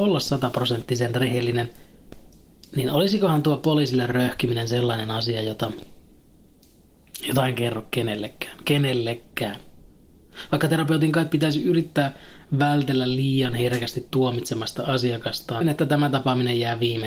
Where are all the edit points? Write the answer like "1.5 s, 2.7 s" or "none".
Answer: 15.6 s

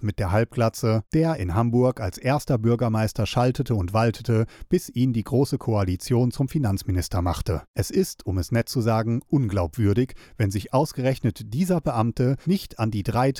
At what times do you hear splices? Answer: 7.7 s, 12.4 s

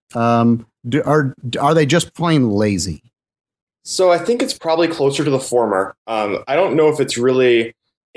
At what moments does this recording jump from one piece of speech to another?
none

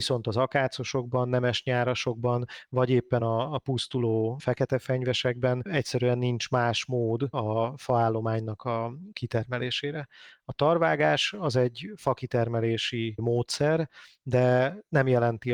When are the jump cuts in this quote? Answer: none

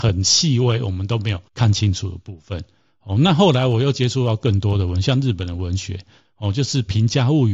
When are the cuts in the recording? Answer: 1.5 s

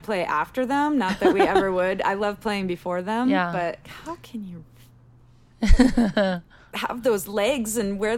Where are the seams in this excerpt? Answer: 3.8 s

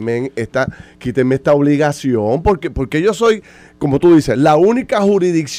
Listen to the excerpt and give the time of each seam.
none

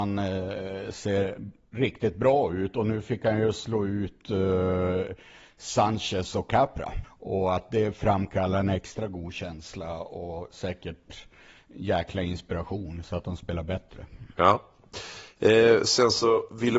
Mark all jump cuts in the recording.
7.0 s

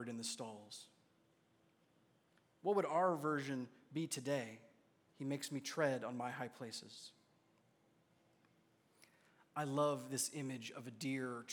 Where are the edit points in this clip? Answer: 2.4 s, 5.0 s

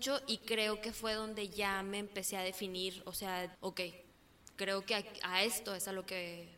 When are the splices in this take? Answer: 3.5 s

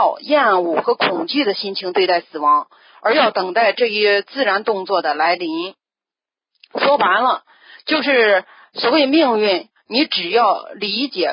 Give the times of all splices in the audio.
none

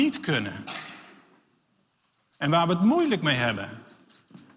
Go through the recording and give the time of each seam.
none

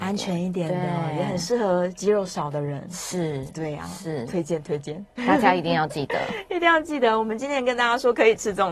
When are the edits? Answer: none

